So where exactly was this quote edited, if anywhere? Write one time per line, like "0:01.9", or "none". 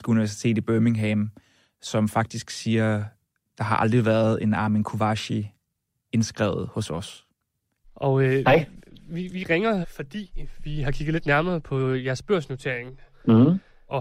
0:07.8
0:09.8